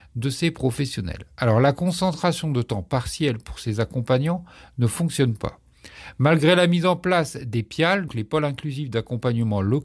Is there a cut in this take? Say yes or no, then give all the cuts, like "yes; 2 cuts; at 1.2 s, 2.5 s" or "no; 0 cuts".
yes; 1 cut; at 8.1 s